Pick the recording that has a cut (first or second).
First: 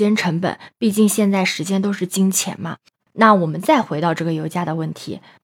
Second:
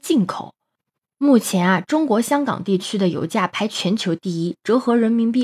first